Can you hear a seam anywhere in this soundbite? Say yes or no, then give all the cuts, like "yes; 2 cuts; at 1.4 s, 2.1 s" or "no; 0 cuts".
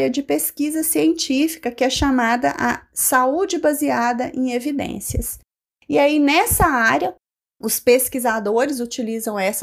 no; 0 cuts